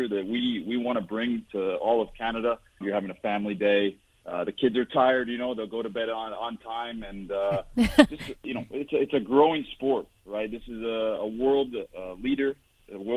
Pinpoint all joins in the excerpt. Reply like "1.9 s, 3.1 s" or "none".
2.8 s